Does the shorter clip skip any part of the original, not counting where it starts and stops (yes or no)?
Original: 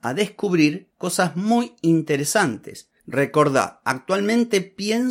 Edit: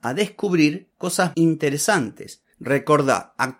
yes